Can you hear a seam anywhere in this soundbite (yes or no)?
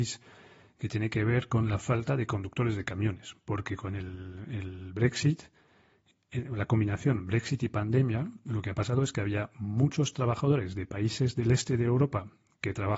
no